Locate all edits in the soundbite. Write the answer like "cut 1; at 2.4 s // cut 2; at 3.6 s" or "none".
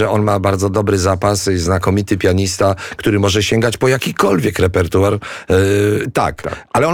cut 1; at 6.0 s